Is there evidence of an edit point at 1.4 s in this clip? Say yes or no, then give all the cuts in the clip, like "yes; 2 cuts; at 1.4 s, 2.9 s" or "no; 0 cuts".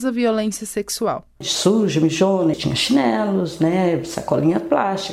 yes; 2 cuts; at 1.4 s, 2.5 s